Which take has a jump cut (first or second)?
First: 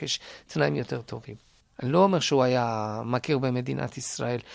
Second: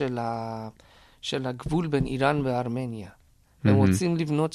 first